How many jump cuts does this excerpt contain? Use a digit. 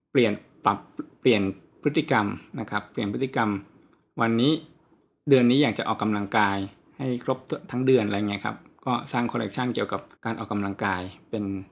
1